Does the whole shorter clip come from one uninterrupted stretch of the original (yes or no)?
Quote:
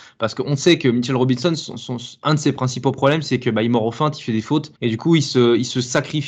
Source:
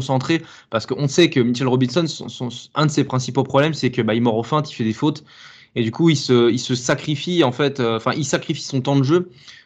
no